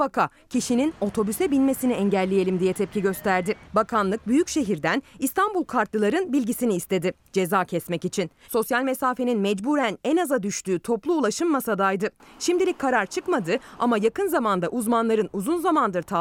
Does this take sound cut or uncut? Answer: cut